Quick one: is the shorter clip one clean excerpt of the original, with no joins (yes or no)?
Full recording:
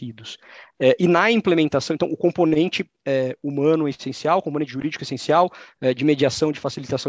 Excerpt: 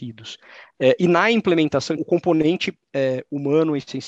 no